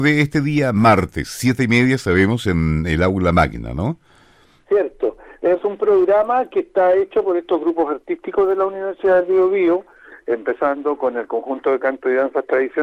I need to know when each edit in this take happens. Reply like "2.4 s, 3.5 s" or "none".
5.6 s

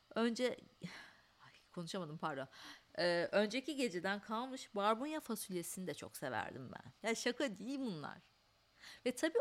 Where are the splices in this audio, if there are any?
7.0 s

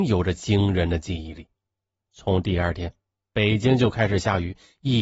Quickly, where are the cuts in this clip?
1.9 s

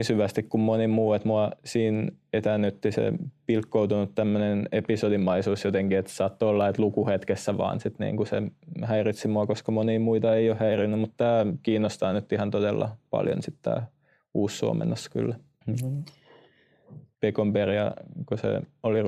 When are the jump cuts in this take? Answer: 15.6 s, 17.1 s

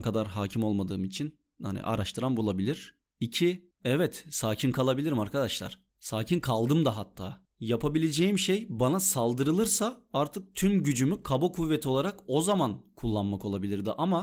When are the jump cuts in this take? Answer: 3.8 s

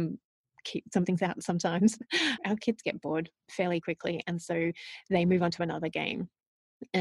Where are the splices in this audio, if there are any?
2.4 s

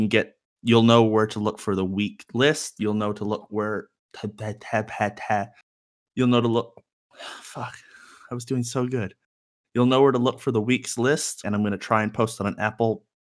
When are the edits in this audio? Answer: 11.4 s

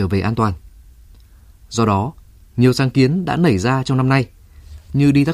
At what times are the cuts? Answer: none

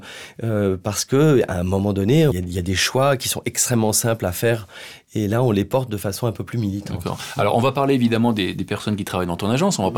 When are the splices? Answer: 2.3 s

